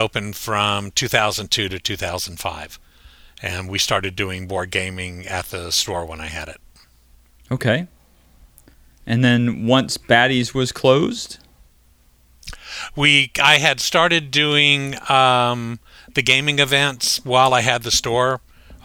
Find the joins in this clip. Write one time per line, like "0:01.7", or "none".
none